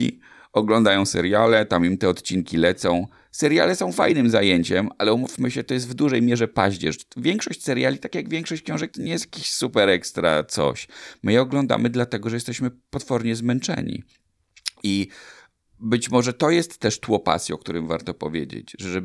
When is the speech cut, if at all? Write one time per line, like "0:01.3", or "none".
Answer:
0:08.9

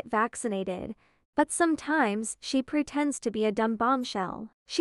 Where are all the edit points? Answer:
0:01.2

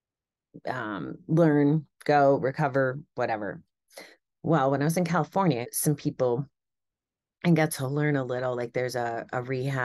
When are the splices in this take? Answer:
0:04.3
0:05.6

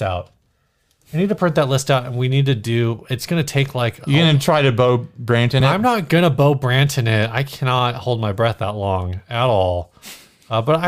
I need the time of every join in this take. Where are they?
none

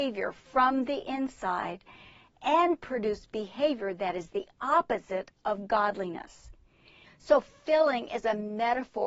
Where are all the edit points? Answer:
0:07.0

